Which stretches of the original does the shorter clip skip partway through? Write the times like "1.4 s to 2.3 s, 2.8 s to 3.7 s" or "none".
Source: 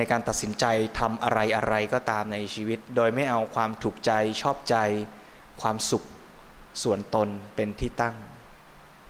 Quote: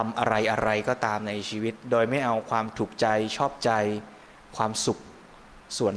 none